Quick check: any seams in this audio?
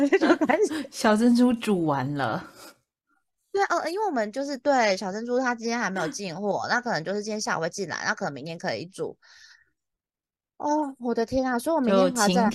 no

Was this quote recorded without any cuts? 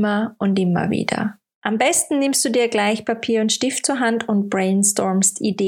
yes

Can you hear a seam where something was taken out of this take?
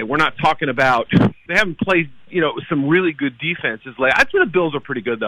yes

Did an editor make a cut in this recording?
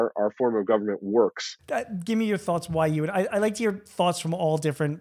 yes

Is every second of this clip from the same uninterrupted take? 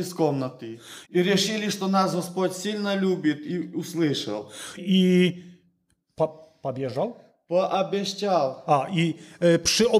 no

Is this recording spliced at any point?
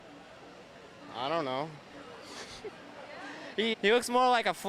yes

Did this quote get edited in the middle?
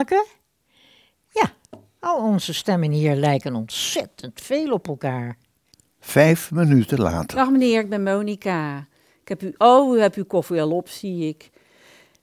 no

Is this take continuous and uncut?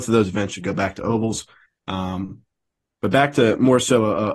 no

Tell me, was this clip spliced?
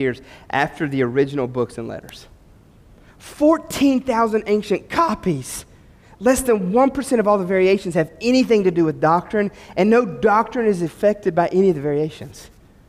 no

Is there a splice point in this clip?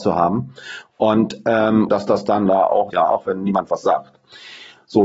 yes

